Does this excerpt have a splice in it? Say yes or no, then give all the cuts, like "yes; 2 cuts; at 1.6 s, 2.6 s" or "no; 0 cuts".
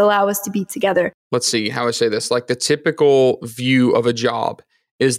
no; 0 cuts